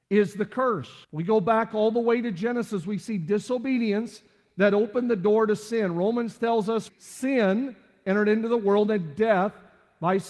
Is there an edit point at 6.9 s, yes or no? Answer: yes